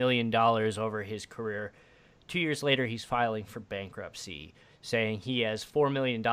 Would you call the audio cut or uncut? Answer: uncut